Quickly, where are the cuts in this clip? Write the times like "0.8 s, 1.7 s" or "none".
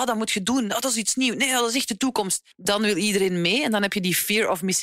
2.5 s